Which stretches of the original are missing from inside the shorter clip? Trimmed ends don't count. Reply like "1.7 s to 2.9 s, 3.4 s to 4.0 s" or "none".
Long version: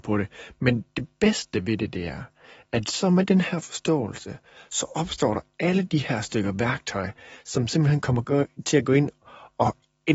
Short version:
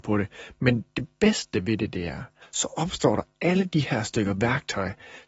2.4 s to 4.6 s